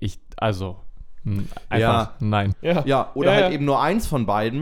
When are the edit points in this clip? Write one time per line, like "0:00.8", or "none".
0:02.5